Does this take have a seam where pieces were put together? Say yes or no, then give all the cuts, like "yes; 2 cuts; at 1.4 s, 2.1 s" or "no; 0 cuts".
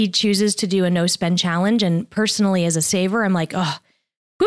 no; 0 cuts